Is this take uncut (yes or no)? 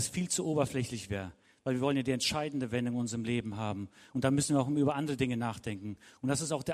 yes